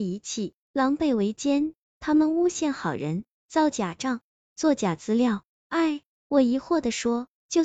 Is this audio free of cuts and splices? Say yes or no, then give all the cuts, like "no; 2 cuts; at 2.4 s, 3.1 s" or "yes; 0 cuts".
no; 1 cut; at 3.3 s